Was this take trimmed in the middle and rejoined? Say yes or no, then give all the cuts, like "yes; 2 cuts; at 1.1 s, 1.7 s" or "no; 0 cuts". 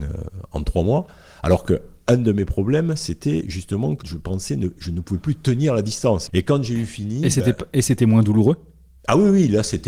yes; 2 cuts; at 4.0 s, 6.3 s